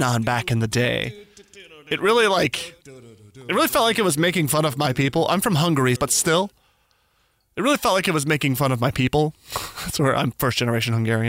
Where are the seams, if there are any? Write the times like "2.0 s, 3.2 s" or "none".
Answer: 6.0 s